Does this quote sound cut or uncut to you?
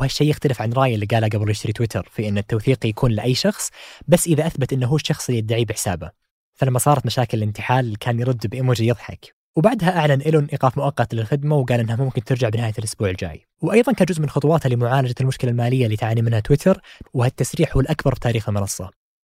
cut